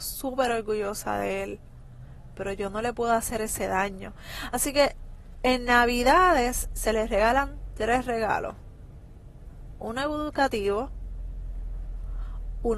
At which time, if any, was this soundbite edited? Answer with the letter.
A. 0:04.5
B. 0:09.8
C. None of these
C